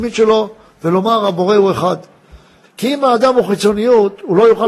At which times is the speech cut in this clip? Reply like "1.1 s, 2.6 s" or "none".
2.6 s